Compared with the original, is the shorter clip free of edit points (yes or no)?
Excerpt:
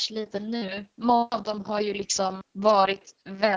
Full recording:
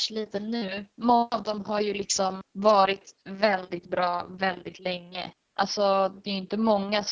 yes